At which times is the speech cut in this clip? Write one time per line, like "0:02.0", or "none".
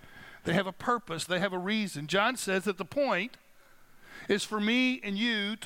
0:01.3